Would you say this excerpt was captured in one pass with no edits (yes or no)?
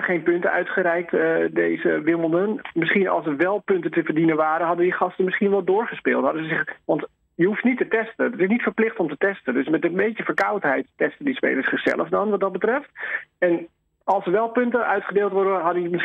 yes